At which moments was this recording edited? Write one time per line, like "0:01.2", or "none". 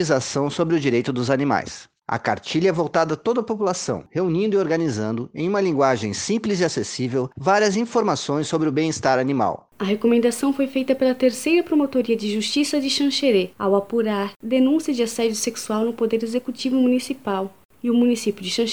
0:09.7
0:14.3